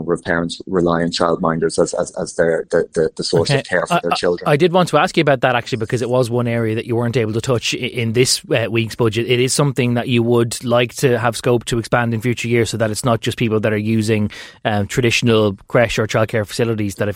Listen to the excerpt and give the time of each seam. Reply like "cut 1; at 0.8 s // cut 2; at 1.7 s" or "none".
none

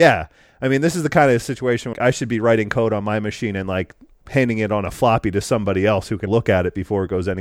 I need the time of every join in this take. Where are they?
cut 1; at 1.9 s // cut 2; at 6.3 s

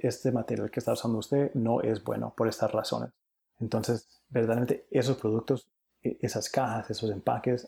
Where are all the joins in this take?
cut 1; at 3.4 s

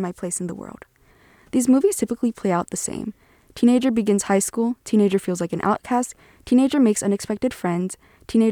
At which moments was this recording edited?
none

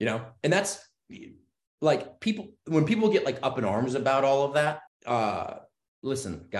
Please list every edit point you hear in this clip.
cut 1; at 4.9 s

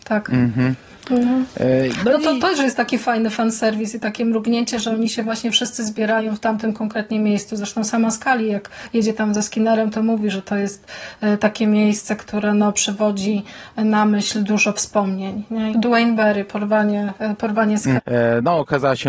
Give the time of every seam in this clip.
cut 1; at 15.7 s // cut 2; at 18.0 s

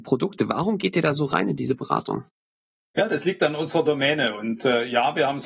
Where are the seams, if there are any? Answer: none

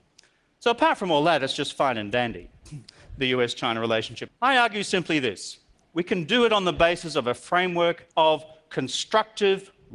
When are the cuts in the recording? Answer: cut 1; at 4.3 s // cut 2; at 8.1 s

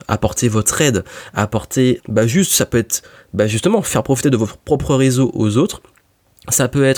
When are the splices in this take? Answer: cut 1; at 2.0 s

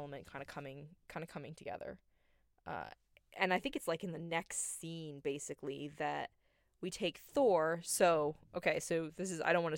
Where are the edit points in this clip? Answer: none

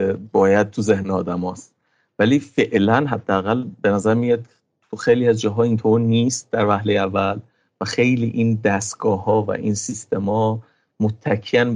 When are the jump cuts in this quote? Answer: none

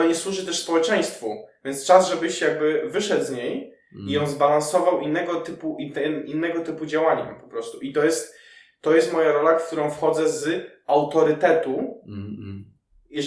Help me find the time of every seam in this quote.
none

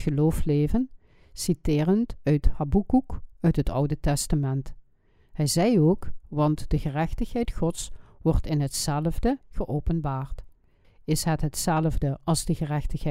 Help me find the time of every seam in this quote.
cut 1; at 9.4 s // cut 2; at 10.8 s

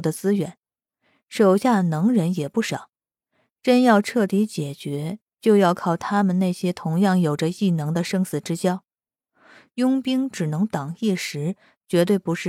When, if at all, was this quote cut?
none

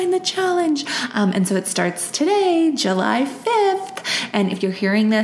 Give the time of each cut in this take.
none

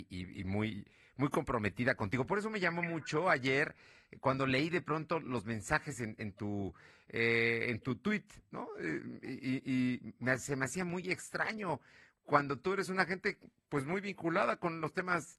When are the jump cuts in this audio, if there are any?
none

